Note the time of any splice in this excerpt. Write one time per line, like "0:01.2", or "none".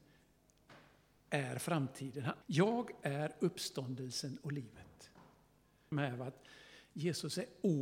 0:02.4
0:05.9